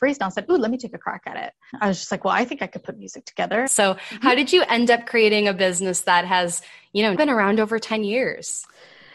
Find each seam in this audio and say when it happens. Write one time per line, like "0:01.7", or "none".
0:01.7
0:03.7
0:07.1